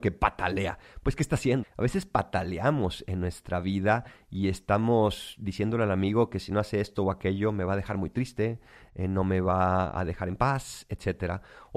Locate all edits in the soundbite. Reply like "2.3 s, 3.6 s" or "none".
1.6 s